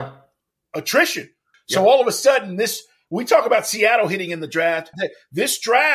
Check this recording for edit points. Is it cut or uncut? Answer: cut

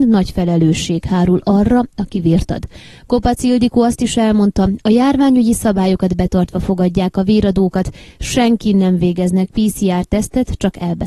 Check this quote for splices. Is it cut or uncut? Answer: uncut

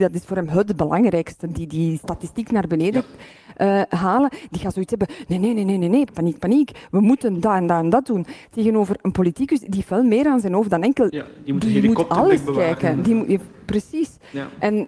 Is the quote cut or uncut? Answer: cut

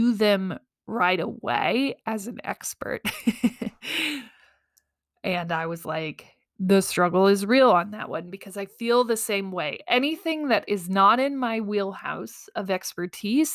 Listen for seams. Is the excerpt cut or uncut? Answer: uncut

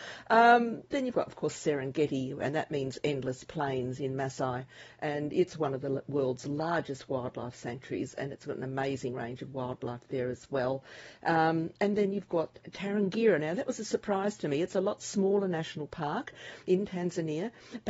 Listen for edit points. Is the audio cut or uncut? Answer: uncut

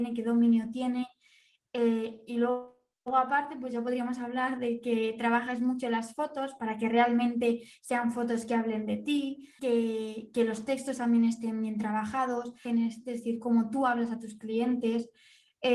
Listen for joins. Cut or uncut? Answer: cut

